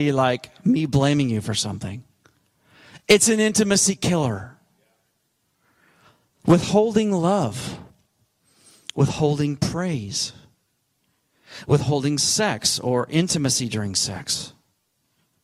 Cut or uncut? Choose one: uncut